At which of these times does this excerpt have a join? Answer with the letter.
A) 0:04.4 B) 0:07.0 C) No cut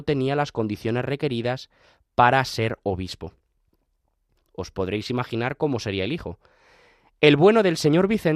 A